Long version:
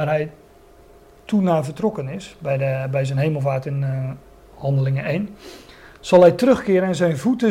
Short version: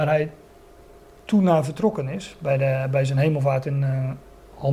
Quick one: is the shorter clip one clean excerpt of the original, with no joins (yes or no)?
yes